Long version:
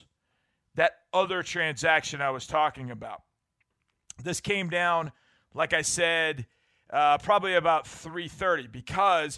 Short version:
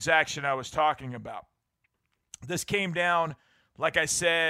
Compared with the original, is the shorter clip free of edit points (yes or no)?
yes